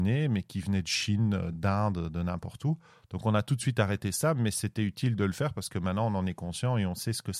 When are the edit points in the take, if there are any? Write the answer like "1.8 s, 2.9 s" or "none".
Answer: none

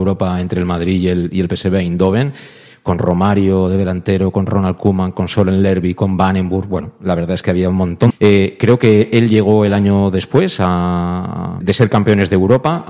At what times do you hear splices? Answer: 8.1 s, 11.6 s

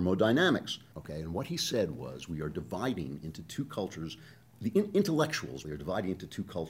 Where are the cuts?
0.9 s, 5.6 s

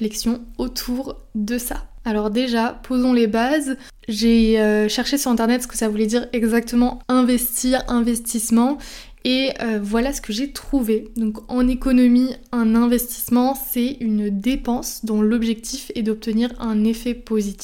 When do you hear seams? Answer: none

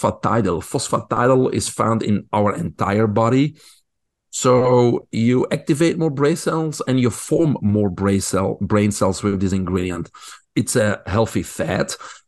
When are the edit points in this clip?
4.3 s, 10.4 s

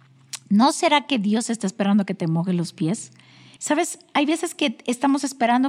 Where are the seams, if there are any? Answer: 3.6 s

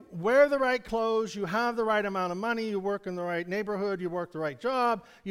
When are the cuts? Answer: none

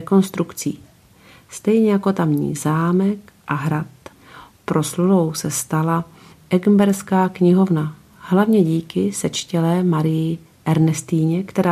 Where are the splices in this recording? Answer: none

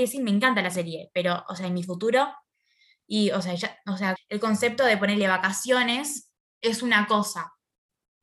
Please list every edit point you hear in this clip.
4.2 s

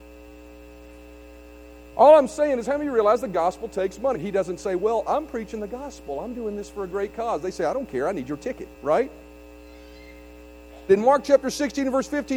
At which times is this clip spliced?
4.1 s, 8.7 s, 10.9 s

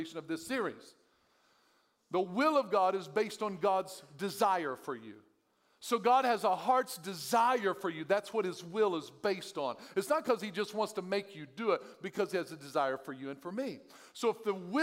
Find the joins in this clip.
none

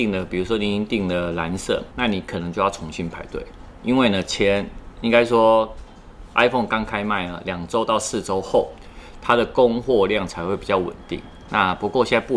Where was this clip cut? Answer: 1.9 s

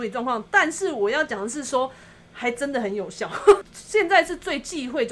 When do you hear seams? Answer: 3.6 s

